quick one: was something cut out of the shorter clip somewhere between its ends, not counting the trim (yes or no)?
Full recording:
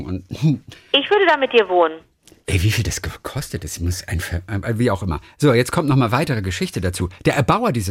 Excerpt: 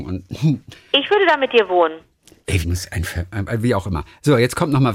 yes